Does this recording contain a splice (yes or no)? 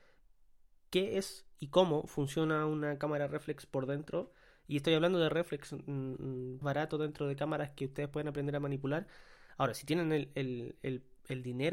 yes